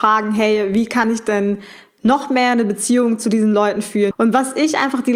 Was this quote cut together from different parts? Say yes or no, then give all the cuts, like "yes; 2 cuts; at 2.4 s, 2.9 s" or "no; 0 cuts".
yes; 1 cut; at 4.1 s